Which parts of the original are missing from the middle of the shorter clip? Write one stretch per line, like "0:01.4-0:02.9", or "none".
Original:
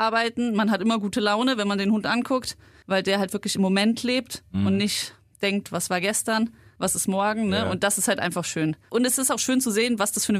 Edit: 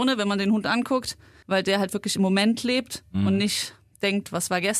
none